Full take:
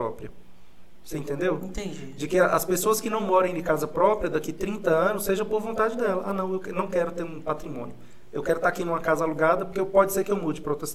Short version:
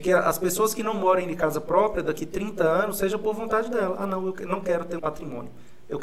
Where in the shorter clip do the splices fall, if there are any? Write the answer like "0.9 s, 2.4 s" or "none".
5.0 s